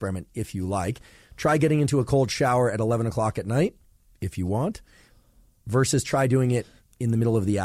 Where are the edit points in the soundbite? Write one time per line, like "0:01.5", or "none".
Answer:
none

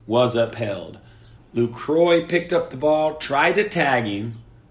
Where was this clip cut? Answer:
0:01.4

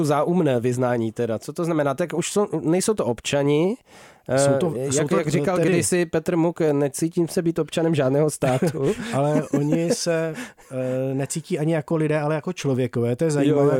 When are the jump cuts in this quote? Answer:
none

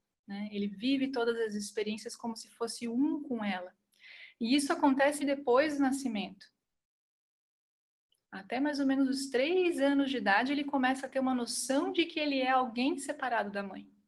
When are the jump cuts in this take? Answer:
0:05.2

